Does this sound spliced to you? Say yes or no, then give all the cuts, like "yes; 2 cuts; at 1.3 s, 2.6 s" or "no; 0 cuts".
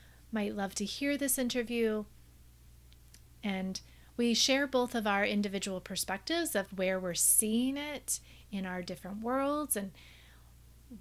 yes; 1 cut; at 3.2 s